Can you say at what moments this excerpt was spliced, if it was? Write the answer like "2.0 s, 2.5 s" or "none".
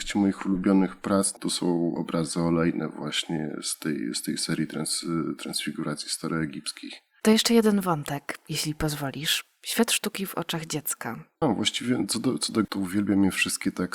11.4 s, 12.6 s